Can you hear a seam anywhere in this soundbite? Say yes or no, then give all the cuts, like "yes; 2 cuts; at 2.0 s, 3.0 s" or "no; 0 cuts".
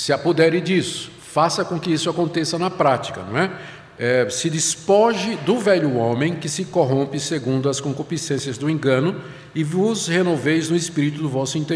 no; 0 cuts